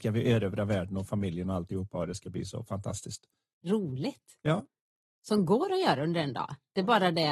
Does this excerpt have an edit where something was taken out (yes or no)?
yes